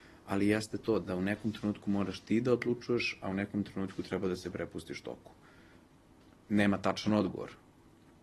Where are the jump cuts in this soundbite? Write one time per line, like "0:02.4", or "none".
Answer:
0:01.0

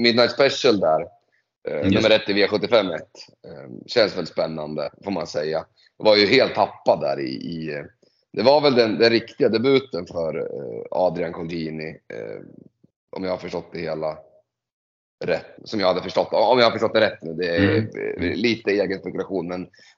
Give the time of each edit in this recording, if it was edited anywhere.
0:15.6

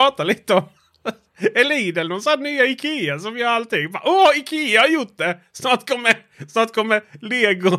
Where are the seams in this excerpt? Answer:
none

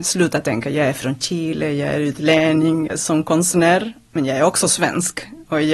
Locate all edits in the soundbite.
0:02.9

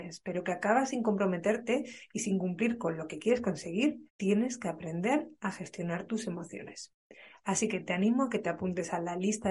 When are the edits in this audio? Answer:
0:04.1

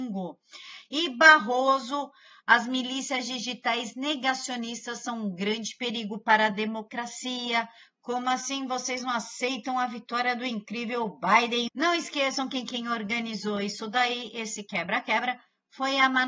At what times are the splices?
0:11.7

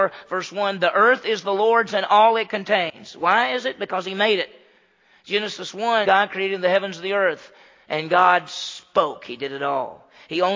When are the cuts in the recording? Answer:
0:06.0

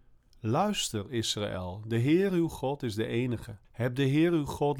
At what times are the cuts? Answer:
0:03.6

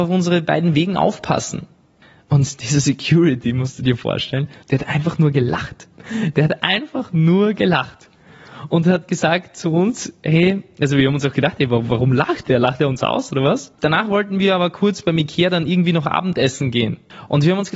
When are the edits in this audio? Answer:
0:13.7

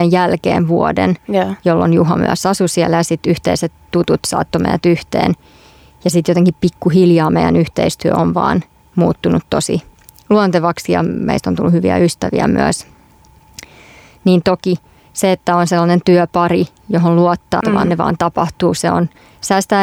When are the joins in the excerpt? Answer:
0:17.6

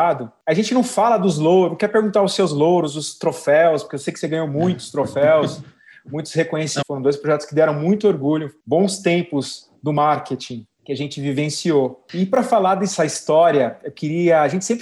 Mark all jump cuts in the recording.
0:06.8

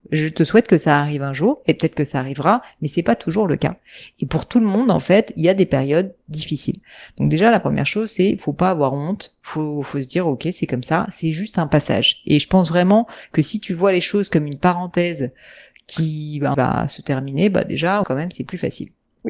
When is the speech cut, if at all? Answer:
0:16.5
0:18.0

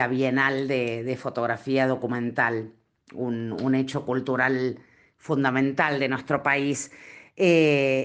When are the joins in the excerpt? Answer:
none

